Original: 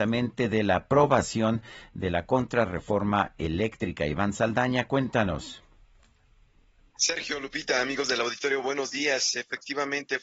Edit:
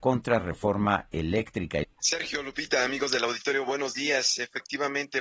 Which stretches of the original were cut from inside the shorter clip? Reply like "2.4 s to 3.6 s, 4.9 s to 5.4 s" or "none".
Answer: 4.1 s to 6.8 s